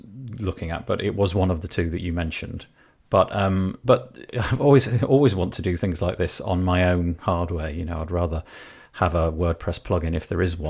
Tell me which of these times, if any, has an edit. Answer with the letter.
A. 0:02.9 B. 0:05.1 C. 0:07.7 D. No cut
D